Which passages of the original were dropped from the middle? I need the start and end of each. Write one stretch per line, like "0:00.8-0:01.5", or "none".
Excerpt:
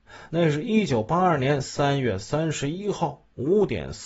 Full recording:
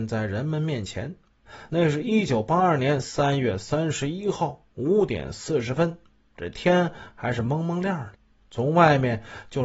none

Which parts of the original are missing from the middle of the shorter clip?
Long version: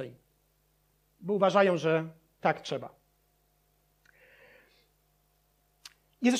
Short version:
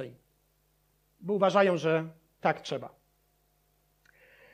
none

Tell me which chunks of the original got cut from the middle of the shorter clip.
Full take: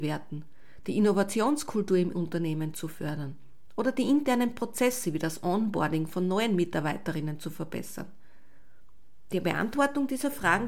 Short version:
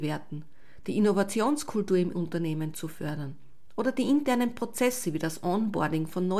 none

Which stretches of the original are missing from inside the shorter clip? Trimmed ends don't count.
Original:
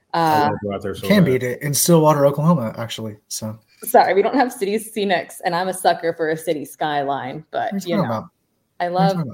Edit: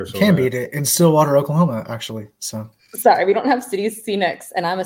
none

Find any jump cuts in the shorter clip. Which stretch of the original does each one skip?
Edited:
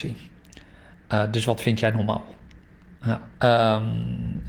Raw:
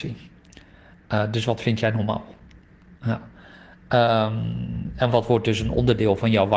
0:03.3-0:03.8

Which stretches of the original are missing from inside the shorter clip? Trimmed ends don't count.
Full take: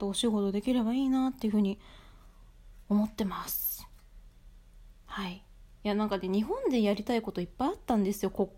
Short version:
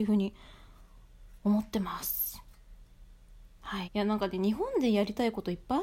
0:05.3-0:05.7

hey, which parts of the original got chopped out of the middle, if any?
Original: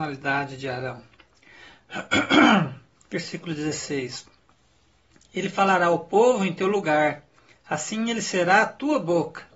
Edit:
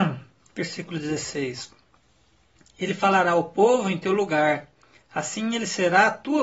none

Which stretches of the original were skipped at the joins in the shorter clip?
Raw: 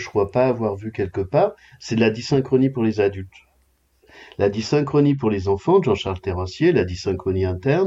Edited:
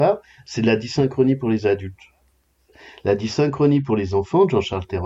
none

